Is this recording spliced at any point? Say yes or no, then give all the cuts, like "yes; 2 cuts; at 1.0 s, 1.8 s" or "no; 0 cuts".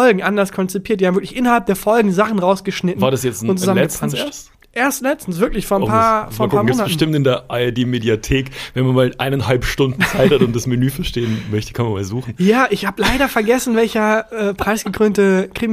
no; 0 cuts